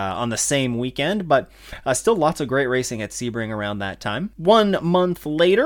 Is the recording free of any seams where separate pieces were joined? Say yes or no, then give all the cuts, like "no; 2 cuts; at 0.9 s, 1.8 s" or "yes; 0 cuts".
yes; 0 cuts